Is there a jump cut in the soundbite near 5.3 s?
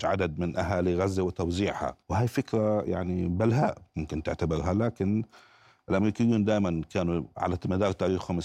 no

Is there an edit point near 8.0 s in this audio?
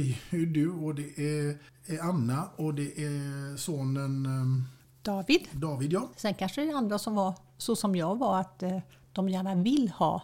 no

